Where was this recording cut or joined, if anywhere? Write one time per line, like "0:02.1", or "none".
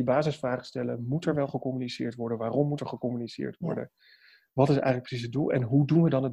none